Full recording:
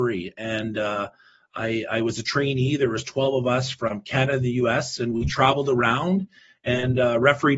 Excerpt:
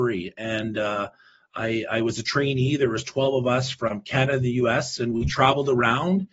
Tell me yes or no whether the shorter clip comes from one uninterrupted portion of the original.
yes